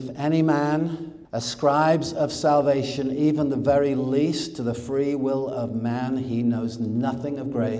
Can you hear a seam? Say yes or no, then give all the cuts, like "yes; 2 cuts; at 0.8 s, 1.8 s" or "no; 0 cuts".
yes; 1 cut; at 1.2 s